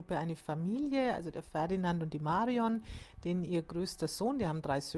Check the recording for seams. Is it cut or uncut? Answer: uncut